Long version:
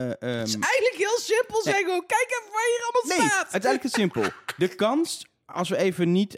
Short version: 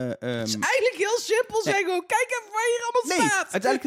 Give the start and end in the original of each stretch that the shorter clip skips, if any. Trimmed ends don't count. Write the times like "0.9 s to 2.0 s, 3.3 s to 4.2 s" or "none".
none